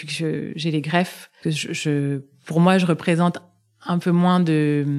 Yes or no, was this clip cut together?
yes